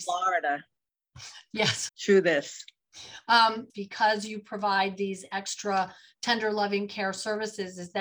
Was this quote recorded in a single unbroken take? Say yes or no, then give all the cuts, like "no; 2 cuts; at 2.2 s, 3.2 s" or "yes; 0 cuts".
no; 2 cuts; at 1.9 s, 3.7 s